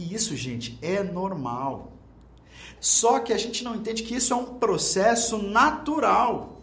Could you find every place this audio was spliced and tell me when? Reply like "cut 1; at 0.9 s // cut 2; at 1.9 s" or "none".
cut 1; at 2.8 s